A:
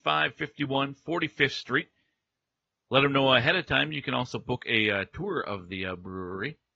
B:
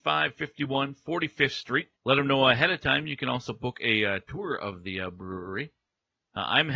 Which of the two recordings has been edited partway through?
B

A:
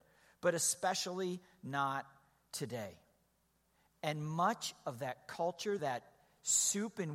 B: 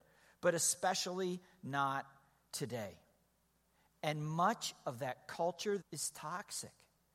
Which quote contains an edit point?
B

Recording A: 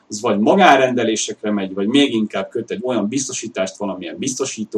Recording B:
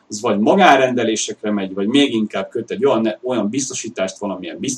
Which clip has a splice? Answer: A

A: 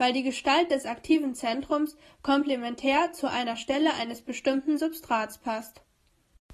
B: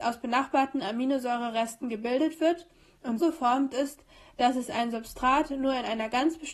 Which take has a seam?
B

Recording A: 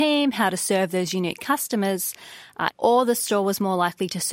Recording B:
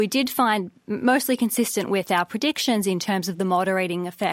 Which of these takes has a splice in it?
A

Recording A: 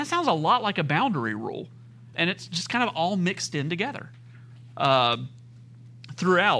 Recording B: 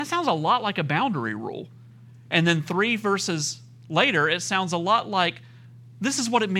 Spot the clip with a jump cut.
A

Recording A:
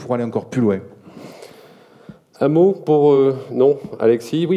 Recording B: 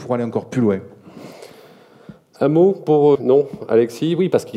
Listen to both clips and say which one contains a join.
B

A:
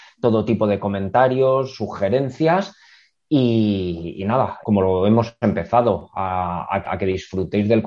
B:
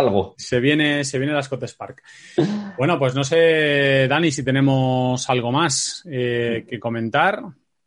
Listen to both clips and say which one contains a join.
A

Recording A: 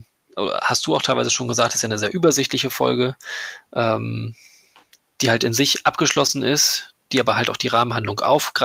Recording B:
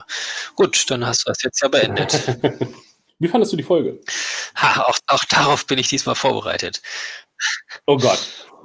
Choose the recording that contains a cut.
B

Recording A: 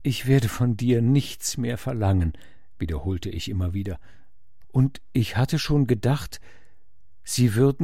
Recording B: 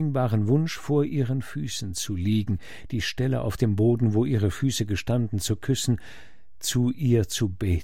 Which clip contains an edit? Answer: A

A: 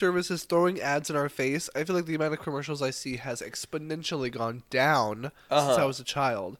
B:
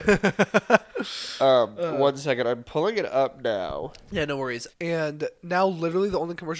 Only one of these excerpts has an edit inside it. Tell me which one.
B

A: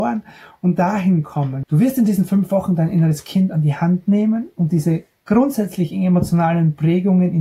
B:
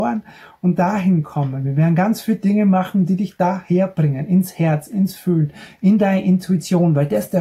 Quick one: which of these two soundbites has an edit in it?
A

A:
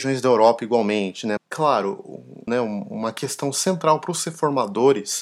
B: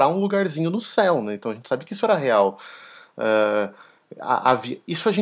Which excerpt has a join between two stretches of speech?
A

